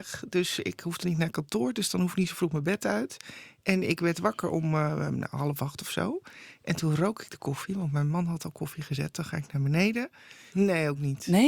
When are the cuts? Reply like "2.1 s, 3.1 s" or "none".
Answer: 10.5 s